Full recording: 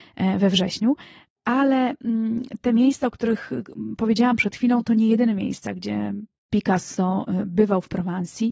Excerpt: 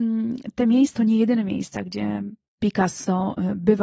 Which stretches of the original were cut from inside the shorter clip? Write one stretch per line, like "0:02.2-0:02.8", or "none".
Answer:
0:03.0-0:04.8